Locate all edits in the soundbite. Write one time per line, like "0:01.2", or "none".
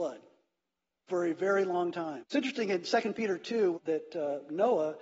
0:02.2
0:03.7